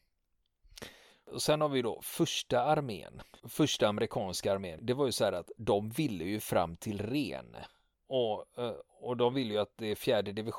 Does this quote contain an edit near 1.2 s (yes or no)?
no